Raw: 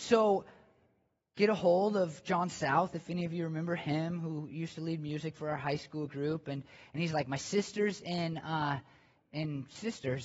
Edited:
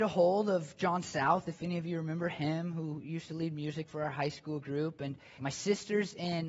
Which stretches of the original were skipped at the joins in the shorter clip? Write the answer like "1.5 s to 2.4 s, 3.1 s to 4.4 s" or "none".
6.9 s to 7.3 s